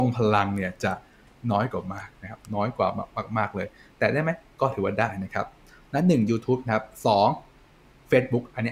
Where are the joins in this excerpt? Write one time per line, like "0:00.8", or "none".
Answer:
none